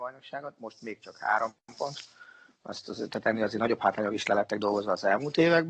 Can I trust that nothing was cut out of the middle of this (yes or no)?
yes